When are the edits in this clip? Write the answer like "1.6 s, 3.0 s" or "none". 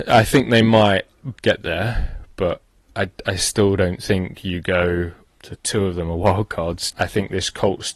1.4 s, 5.3 s, 6.9 s